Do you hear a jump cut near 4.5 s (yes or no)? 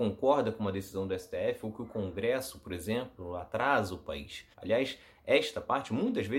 yes